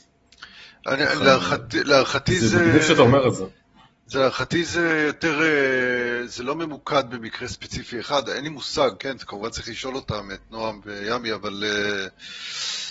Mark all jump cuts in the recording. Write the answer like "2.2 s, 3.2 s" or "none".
none